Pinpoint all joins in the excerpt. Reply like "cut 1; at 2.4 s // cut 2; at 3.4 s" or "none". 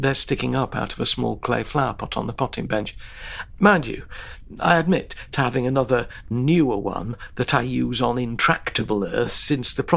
cut 1; at 3.6 s